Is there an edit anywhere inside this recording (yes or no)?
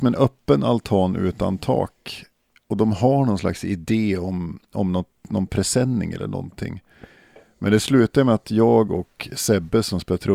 no